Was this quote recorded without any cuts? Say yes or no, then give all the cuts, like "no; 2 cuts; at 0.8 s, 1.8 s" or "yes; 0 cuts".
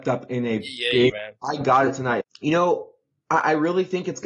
no; 2 cuts; at 1.1 s, 2.2 s